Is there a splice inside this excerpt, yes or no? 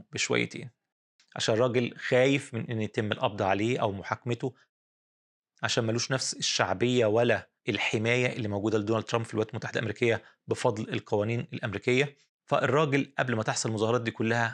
yes